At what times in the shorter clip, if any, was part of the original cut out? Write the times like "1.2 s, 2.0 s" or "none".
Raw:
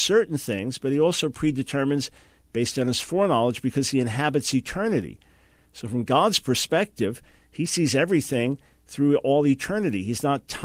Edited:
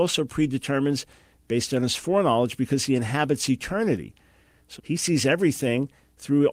4.8 s